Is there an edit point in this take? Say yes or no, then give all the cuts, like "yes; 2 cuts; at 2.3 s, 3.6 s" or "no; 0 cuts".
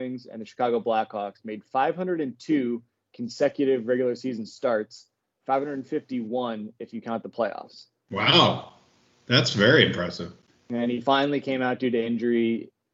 no; 0 cuts